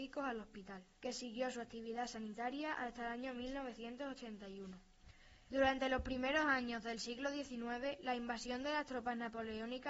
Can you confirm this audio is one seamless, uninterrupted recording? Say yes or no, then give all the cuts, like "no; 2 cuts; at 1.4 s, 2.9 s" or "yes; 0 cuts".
no; 2 cuts; at 1.0 s, 5.5 s